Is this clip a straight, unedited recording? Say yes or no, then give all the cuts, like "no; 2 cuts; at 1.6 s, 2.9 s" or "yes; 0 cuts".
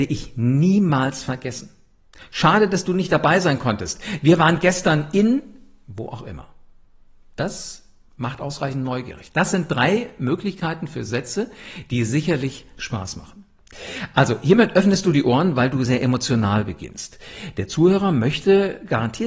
no; 1 cut; at 15.8 s